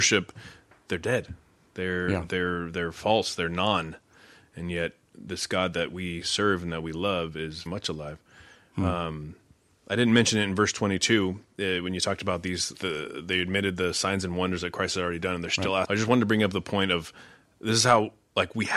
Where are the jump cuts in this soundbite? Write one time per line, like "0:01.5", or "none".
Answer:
0:07.7
0:12.7
0:15.8